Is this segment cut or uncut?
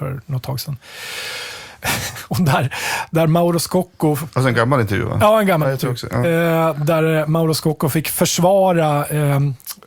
uncut